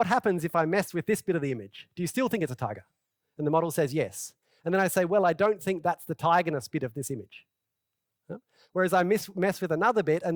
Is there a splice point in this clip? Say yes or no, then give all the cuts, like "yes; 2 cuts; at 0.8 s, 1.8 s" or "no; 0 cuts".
no; 0 cuts